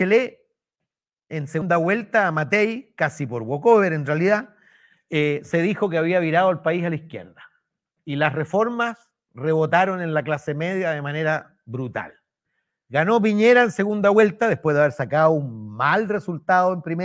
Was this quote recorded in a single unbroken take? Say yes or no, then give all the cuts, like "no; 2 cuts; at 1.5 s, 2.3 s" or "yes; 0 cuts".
yes; 0 cuts